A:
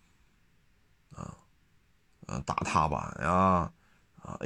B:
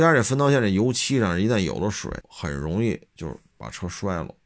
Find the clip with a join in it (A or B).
B